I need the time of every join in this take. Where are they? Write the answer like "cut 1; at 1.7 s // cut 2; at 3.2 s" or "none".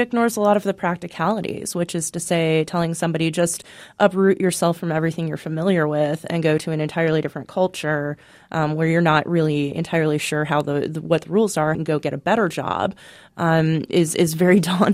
cut 1; at 11.7 s